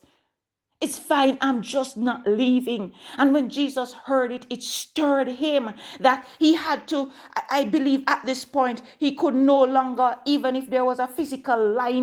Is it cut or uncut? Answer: uncut